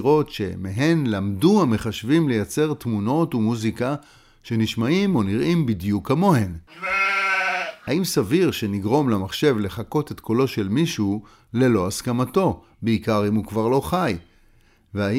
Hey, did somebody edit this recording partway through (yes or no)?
no